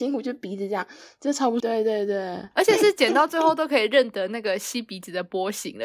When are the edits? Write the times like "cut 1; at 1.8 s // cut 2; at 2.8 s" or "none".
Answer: cut 1; at 1.6 s